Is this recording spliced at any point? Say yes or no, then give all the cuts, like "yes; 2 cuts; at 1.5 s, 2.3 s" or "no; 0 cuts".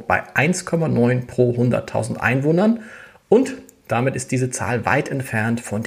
no; 0 cuts